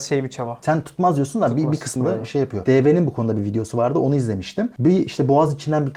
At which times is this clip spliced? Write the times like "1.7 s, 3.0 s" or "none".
2.0 s